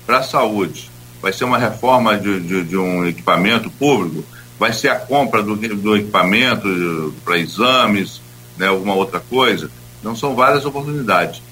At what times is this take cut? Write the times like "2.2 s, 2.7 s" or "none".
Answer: 9.8 s